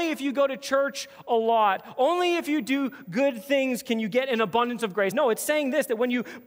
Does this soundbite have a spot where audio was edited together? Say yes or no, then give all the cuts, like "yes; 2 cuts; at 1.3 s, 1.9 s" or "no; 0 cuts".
yes; 1 cut; at 5.1 s